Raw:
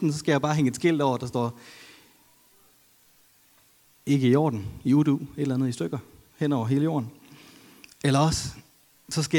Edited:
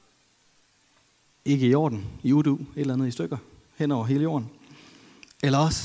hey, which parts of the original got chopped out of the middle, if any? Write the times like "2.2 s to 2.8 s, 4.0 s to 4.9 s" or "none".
none